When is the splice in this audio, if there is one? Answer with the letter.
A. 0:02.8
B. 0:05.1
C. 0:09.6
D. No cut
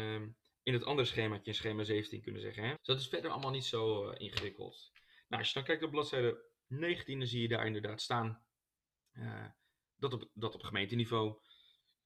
A